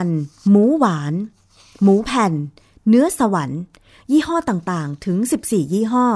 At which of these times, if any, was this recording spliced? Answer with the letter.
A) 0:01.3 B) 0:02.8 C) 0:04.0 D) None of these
D